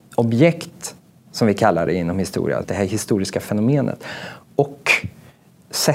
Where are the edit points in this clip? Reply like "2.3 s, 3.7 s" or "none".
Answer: 2.6 s